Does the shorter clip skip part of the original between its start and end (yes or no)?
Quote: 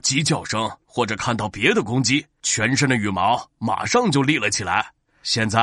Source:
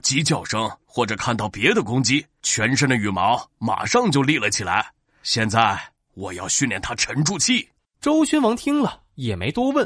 no